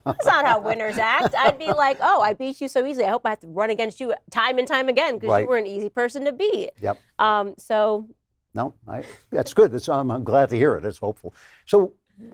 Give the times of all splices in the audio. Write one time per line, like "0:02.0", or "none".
none